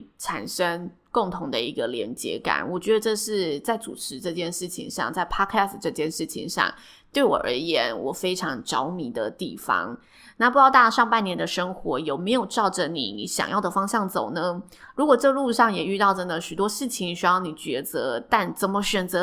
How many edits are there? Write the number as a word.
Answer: zero